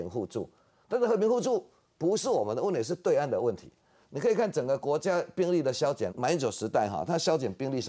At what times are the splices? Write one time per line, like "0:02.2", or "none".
0:06.1